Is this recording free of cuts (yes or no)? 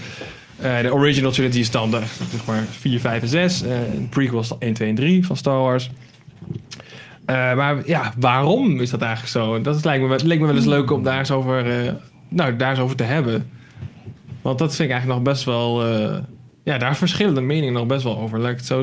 yes